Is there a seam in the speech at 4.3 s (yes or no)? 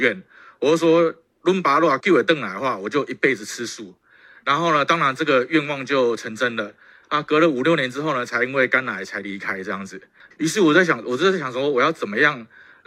no